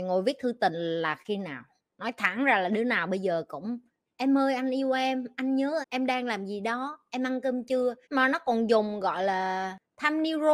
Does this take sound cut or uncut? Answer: cut